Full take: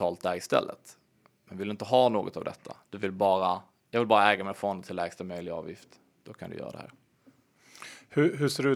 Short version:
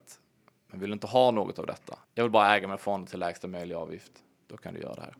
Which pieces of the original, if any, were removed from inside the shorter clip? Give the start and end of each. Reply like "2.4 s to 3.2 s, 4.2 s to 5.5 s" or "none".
2.8 s to 3.8 s